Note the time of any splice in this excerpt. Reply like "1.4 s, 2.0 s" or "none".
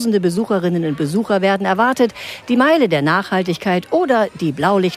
2.4 s

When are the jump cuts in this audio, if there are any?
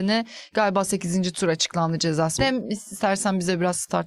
2.4 s

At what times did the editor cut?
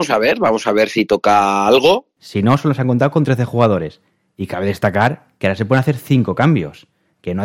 2.2 s

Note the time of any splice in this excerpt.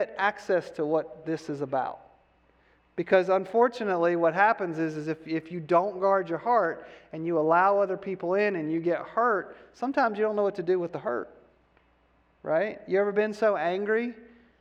none

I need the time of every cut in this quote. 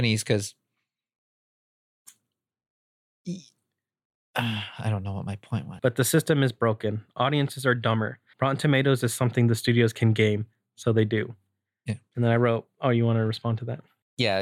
5.8 s, 8.3 s

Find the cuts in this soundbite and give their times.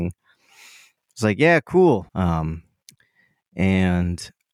2.1 s

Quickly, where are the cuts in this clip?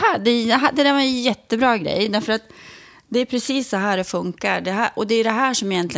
none

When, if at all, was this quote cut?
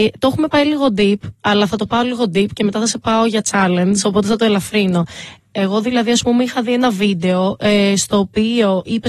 5.4 s

